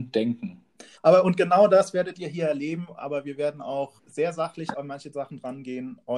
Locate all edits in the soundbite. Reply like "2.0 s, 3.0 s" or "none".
0.9 s, 4.0 s